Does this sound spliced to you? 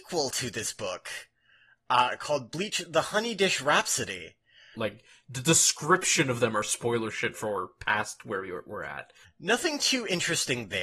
yes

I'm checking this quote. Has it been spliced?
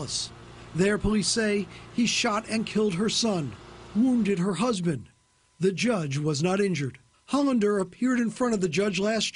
no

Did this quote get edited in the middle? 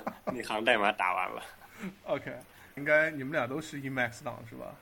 yes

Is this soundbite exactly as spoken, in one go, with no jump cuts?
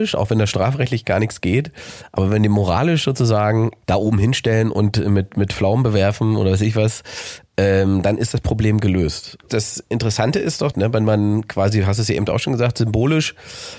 no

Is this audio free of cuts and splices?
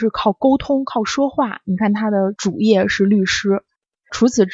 yes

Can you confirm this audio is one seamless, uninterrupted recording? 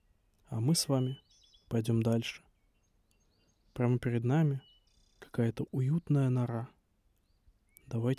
yes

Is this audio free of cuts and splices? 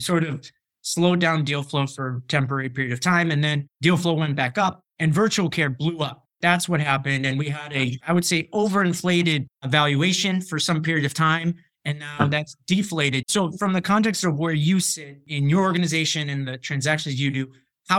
no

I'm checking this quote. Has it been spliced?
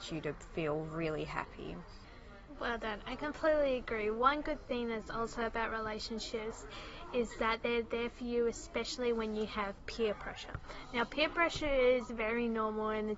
no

